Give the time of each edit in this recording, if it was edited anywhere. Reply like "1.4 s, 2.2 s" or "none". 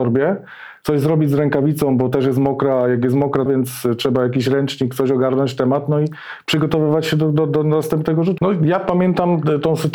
3.5 s, 8.4 s